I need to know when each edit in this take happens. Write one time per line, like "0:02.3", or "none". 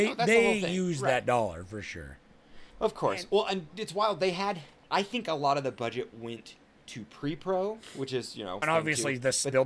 0:02.7
0:08.6